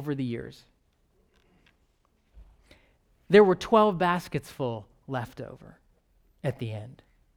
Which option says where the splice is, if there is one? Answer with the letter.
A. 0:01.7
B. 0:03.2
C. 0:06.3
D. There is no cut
D